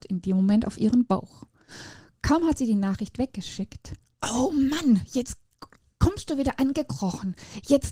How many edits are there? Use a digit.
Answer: 1